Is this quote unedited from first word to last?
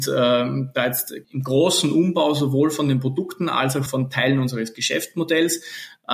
no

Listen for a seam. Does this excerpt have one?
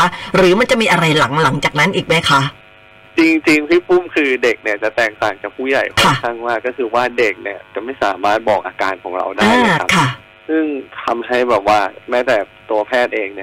no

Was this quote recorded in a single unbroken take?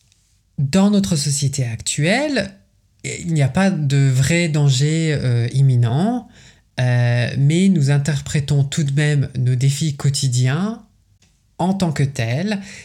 yes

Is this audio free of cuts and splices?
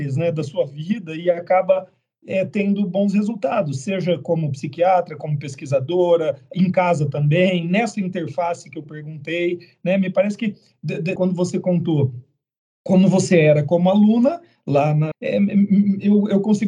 no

